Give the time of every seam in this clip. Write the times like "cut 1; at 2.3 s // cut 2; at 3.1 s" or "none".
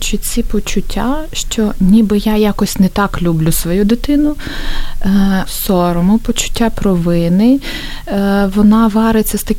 cut 1; at 5.5 s